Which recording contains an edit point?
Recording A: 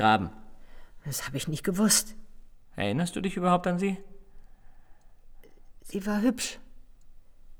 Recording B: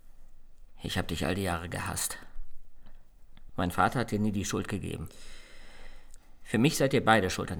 B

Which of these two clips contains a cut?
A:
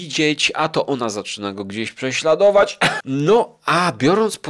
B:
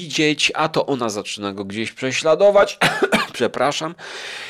A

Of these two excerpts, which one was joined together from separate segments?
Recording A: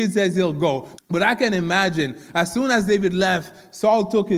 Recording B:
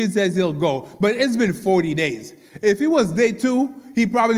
A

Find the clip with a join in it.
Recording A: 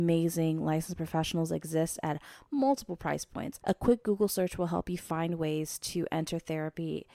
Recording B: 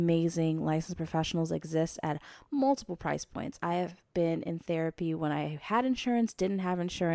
A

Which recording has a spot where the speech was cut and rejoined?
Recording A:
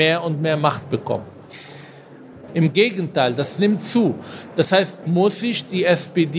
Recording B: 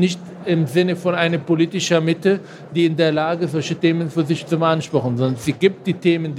A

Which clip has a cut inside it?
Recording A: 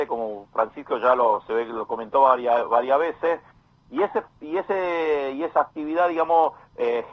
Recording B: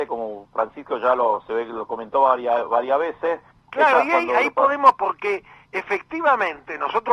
B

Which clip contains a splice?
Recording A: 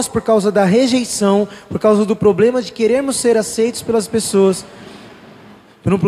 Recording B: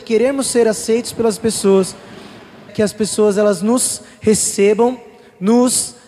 B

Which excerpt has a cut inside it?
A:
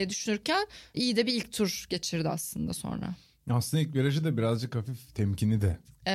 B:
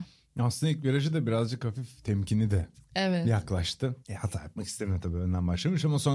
B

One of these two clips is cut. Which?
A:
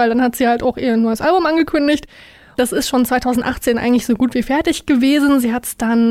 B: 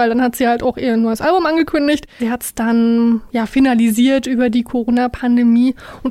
B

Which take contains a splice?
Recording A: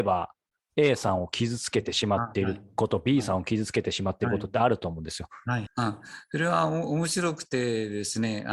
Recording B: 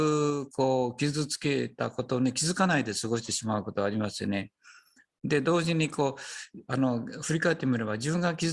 A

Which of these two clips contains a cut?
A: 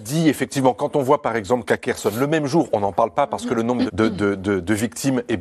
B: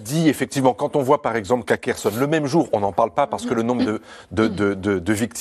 A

